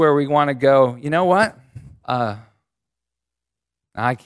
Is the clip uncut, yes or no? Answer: no